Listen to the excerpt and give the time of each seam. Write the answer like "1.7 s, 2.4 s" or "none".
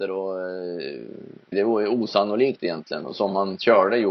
1.5 s